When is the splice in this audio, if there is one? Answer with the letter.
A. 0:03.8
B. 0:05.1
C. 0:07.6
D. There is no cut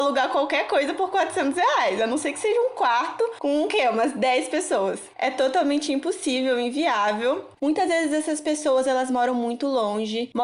C